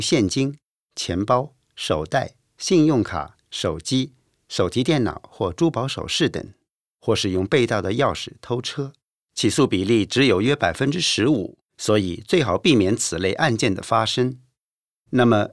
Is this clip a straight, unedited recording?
no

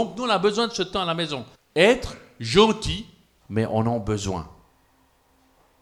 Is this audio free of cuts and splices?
no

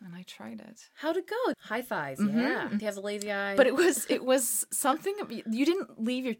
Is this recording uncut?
no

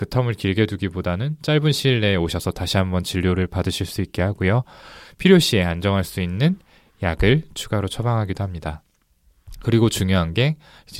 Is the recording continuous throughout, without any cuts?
yes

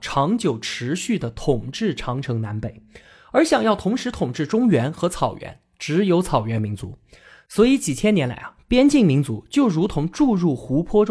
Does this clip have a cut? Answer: no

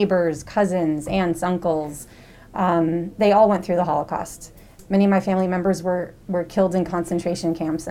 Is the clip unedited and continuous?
no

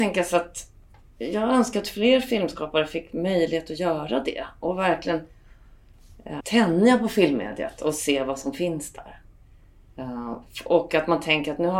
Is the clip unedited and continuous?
no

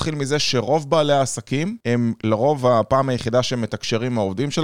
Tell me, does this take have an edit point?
yes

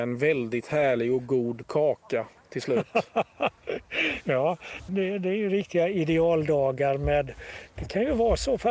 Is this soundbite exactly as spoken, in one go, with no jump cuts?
no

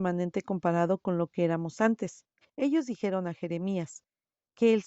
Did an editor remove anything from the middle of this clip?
yes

